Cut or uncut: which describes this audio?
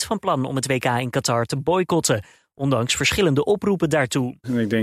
uncut